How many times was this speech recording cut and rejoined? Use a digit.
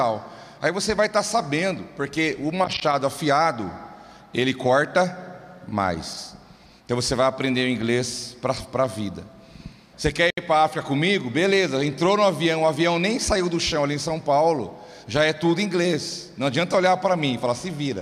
1